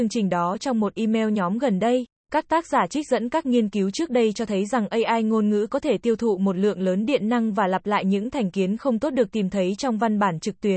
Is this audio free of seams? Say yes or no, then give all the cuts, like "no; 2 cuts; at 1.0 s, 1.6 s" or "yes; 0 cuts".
no; 1 cut; at 2.2 s